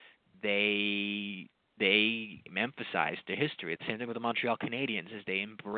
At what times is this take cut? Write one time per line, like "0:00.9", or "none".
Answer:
0:03.8